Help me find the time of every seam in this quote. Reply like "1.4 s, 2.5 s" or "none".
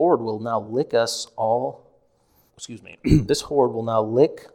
2.5 s